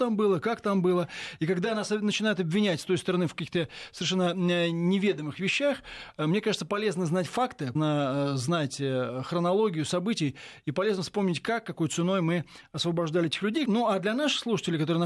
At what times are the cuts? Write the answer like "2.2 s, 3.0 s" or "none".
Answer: 7.8 s, 13.7 s